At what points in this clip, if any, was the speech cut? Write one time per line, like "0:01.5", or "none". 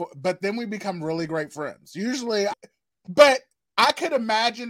0:02.5